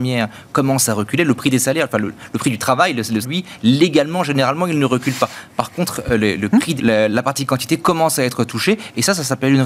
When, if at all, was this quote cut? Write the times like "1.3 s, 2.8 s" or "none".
3.2 s, 6.8 s